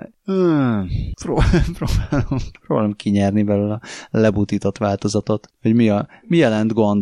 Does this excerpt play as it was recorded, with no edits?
yes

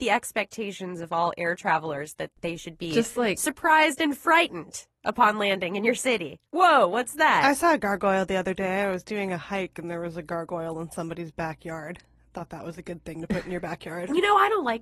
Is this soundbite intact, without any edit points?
yes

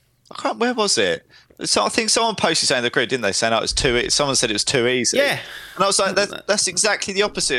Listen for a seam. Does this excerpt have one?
no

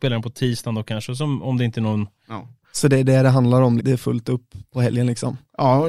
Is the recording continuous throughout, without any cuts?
no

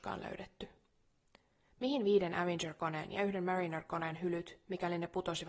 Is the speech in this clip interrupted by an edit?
no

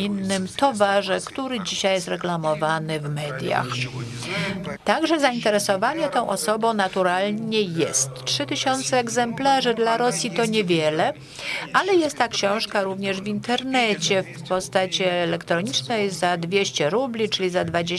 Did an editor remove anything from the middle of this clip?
yes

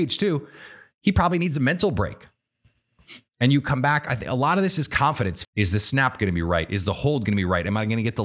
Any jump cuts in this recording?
yes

